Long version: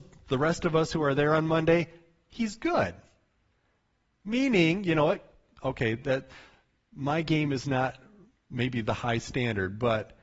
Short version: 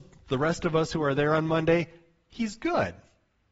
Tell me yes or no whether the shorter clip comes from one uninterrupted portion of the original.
yes